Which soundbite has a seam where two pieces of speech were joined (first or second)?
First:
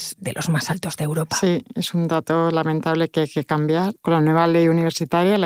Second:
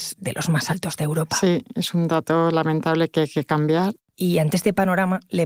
second